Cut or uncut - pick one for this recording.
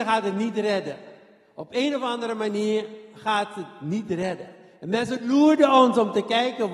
uncut